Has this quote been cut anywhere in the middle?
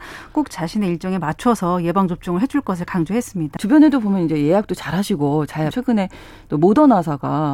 yes; 2 cuts; at 3.6 s, 5.7 s

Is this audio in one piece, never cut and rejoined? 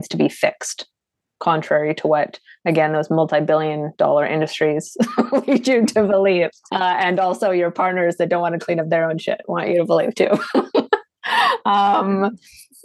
no; 1 cut; at 6.7 s

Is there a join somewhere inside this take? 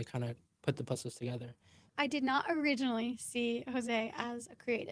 yes; 1 cut; at 1.9 s

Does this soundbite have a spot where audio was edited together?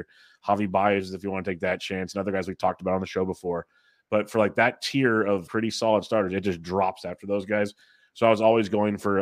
yes; 1 cut; at 5.5 s

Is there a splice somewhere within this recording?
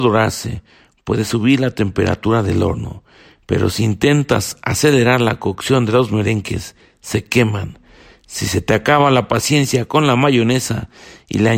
no; 0 cuts

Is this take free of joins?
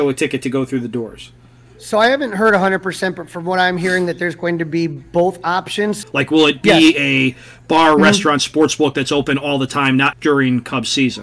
no; 2 cuts; at 6.0 s, 10.1 s

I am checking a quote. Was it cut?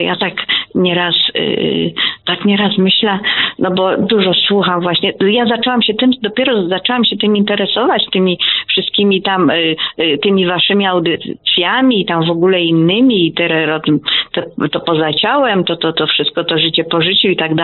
no; 0 cuts

